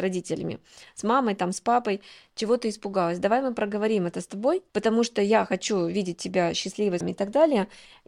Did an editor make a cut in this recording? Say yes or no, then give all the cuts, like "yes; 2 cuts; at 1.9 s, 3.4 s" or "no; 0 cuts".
yes; 2 cuts; at 4.7 s, 7.0 s